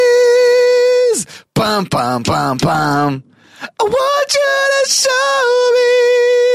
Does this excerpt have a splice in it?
no; 0 cuts

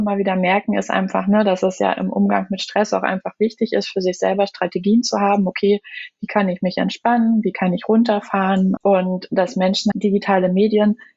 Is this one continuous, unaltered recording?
no; 2 cuts; at 8.8 s, 9.9 s

